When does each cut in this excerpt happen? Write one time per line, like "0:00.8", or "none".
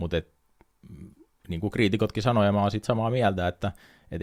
none

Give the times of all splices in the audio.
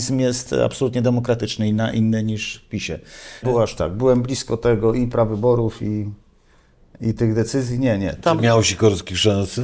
0:03.4

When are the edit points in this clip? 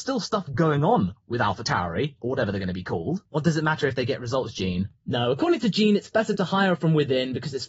0:03.2

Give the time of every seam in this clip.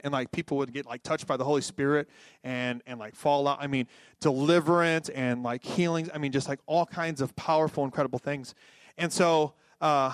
none

